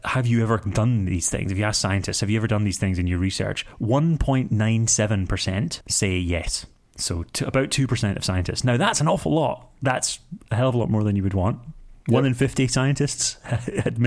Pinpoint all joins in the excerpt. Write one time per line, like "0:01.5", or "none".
0:05.8